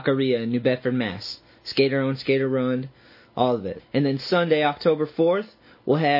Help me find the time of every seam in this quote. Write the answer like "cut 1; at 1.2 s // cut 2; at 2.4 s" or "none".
cut 1; at 1.6 s // cut 2; at 3.8 s